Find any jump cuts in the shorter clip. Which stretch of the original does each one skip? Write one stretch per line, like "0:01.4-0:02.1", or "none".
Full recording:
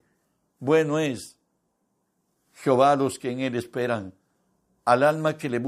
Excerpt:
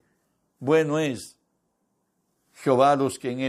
none